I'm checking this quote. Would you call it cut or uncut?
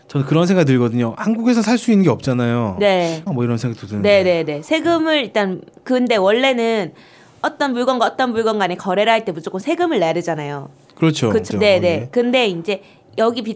cut